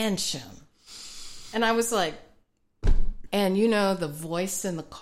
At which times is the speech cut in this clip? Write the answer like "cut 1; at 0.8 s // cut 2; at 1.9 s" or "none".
cut 1; at 3.3 s